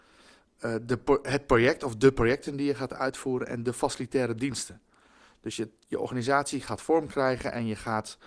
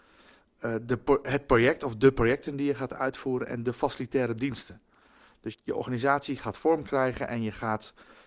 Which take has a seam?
second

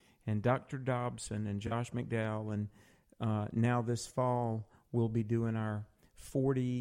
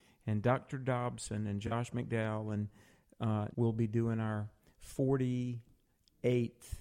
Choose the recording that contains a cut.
second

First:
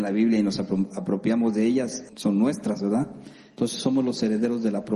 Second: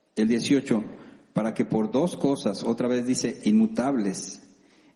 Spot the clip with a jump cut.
first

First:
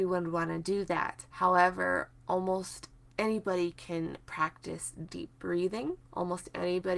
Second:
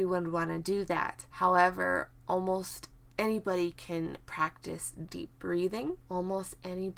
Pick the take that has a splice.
second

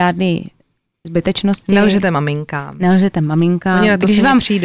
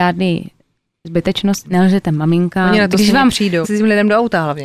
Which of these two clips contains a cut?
second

